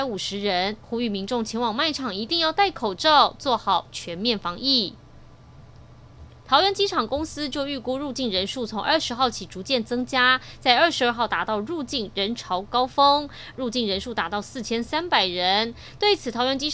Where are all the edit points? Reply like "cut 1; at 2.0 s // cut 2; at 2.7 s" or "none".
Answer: cut 1; at 6.4 s // cut 2; at 13.5 s